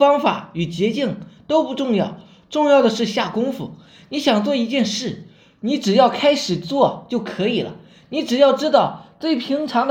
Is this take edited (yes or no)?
no